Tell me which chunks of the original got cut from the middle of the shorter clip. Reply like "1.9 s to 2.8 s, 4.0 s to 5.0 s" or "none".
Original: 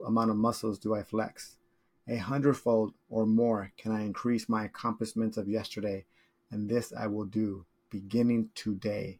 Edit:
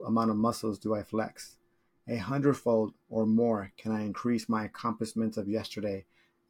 none